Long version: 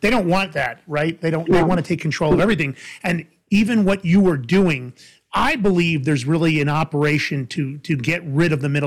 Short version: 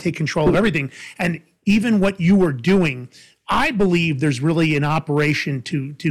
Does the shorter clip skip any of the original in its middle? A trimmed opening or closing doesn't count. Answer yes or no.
no